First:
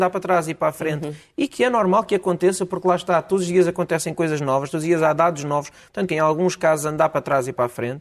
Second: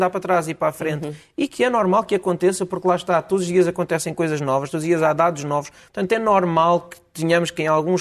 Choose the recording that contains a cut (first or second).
first